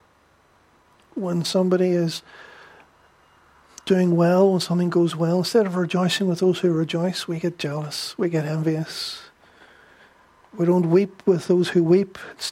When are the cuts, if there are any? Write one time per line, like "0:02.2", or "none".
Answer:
none